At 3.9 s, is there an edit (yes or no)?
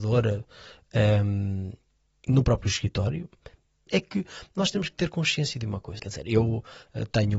yes